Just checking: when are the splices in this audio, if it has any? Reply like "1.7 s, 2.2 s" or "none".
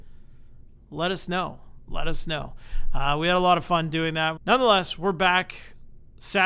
4.4 s